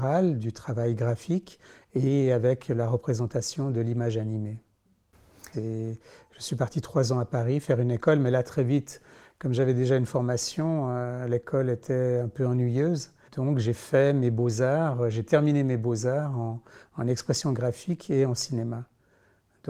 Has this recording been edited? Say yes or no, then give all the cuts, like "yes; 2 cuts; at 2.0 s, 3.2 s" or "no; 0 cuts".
yes; 2 cuts; at 5.5 s, 13.3 s